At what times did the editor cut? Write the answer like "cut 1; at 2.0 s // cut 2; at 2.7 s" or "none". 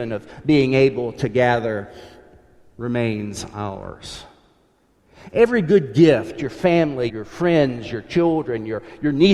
cut 1; at 7.1 s